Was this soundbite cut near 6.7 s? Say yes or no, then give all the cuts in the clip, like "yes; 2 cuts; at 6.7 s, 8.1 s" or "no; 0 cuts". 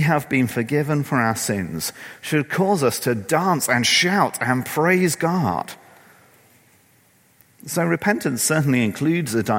no; 0 cuts